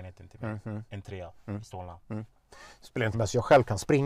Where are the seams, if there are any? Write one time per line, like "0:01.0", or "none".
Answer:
0:03.1

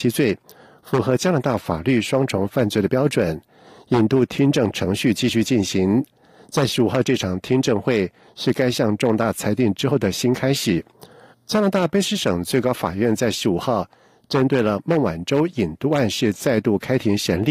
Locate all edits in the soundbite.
0:11.3

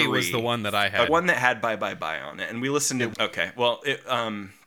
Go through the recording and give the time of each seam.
0:01.1
0:03.1

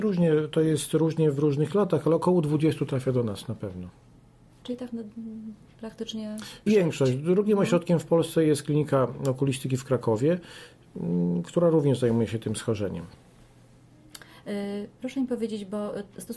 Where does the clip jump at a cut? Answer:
0:06.7

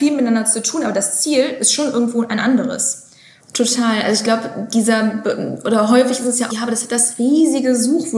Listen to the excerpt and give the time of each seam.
0:03.4
0:06.5

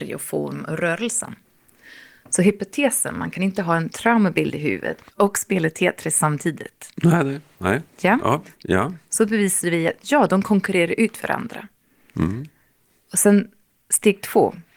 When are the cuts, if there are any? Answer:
0:08.6

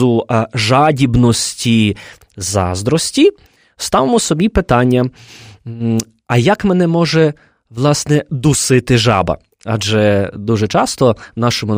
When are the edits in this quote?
none

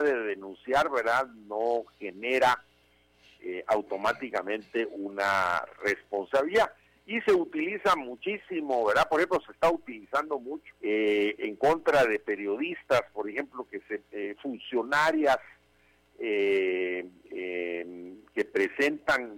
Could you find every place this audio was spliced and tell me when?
0:10.8

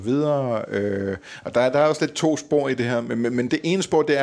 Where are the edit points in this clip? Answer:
none

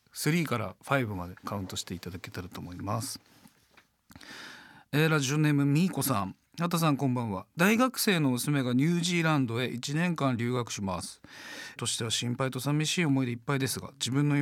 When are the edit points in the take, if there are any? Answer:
0:11.8

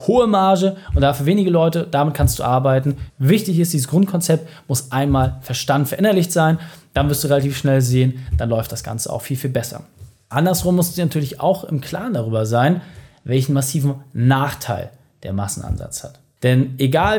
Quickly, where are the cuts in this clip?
0:03.1

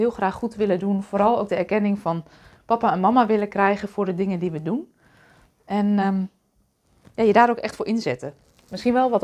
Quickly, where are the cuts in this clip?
none

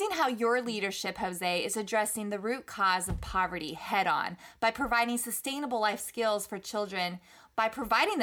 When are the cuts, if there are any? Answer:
none

